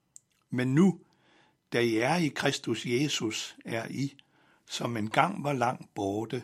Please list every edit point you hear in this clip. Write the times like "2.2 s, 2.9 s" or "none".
none